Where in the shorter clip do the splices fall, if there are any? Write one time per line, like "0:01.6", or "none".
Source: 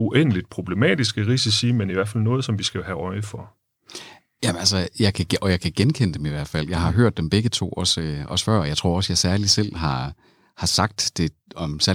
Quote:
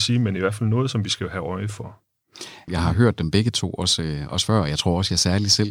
0:02.7